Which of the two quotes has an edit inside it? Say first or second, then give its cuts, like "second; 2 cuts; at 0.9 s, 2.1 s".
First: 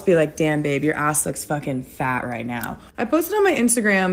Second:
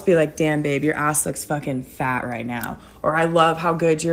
first; 1 cut; at 2.9 s